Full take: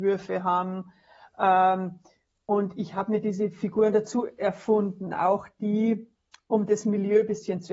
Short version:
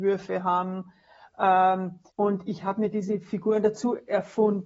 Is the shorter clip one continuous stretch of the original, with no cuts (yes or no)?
no